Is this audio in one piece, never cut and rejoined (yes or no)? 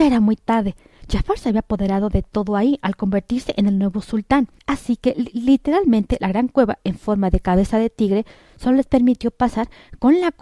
no